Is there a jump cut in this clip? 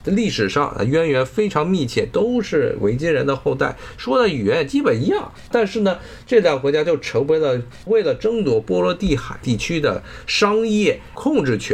no; 0 cuts

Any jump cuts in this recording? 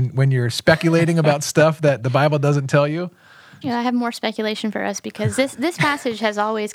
yes; 1 cut; at 3.6 s

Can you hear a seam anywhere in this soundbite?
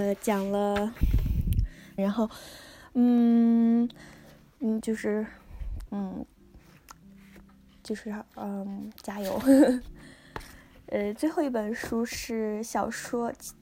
yes; 3 cuts; at 2.0 s, 4.8 s, 5.9 s

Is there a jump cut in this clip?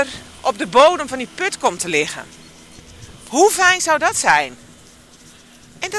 no; 0 cuts

